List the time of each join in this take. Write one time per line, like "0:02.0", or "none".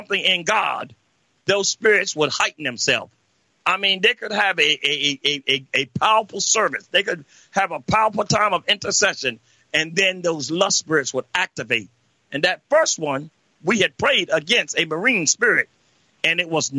none